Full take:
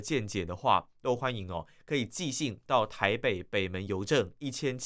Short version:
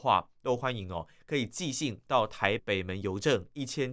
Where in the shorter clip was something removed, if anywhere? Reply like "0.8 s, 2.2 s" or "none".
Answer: 2.6 s